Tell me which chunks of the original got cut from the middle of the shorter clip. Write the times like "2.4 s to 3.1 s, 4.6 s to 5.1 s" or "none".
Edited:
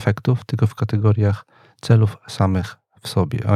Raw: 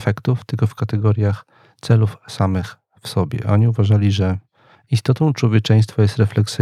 none